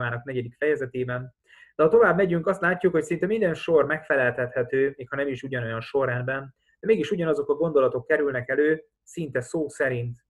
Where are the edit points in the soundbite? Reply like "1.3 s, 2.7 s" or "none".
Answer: none